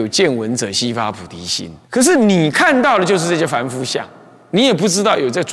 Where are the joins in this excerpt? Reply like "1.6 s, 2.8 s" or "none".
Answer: 1.9 s